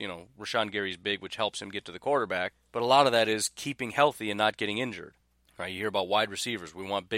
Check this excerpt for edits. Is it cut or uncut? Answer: uncut